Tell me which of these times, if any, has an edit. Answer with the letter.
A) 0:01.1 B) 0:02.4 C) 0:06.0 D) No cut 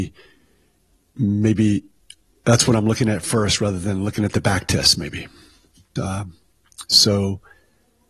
C